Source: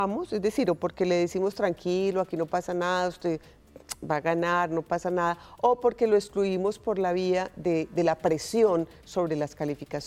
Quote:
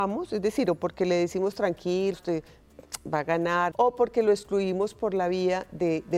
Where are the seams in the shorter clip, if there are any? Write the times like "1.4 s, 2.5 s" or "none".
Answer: 2.1 s, 3.7 s